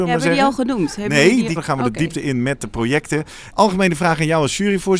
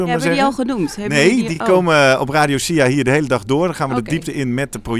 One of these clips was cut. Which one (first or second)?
first